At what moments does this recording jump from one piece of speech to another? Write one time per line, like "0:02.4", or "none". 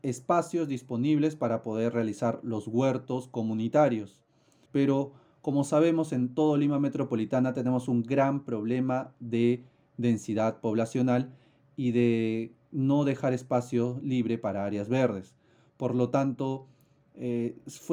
0:04.7